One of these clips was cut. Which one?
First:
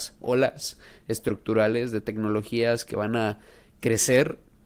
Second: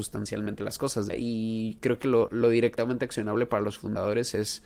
second; 2 cuts; at 1.1 s, 2.3 s

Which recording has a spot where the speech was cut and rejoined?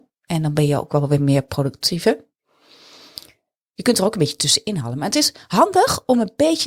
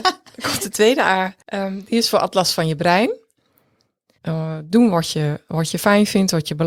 second; 2 cuts; at 1.4 s, 4.2 s

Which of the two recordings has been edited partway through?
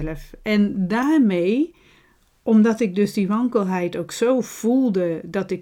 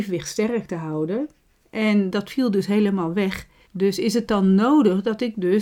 second; 1 cut; at 3.7 s

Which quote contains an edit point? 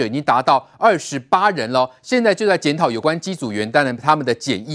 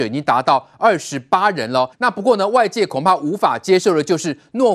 second; 1 cut; at 1.9 s

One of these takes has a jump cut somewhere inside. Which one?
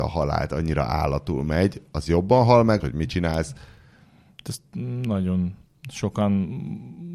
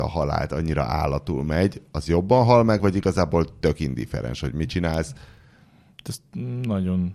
first; 1 cut; at 2.8 s

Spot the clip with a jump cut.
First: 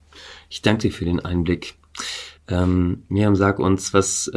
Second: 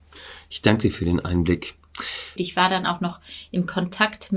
second; 1 cut; at 2.4 s

